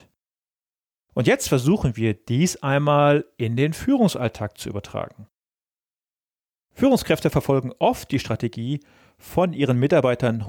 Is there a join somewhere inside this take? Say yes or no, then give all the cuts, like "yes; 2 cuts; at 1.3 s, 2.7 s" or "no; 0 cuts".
no; 0 cuts